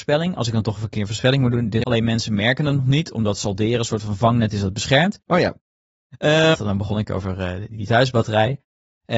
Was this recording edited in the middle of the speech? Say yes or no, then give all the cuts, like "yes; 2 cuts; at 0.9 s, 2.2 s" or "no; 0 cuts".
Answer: yes; 3 cuts; at 1.8 s, 5.3 s, 6.5 s